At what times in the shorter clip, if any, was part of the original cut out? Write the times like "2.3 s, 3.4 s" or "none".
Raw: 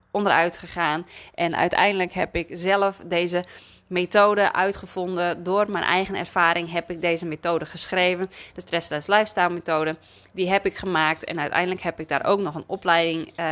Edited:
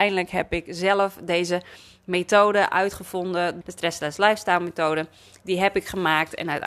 3.6 s